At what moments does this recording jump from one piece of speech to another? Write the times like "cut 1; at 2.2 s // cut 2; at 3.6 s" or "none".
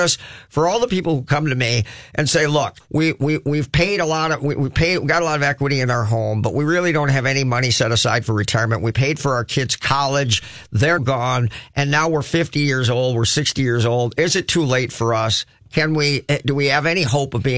cut 1; at 2.8 s // cut 2; at 11.0 s